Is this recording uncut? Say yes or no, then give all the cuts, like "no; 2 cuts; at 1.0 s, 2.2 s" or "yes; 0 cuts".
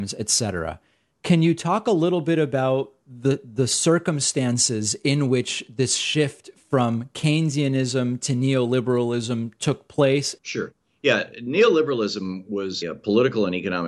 no; 2 cuts; at 10.4 s, 12.8 s